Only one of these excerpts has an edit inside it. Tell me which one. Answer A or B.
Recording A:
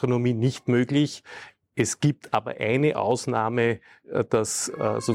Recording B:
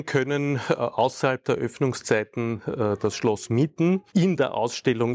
B